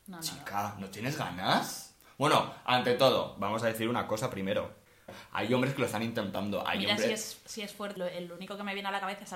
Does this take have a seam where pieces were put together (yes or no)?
yes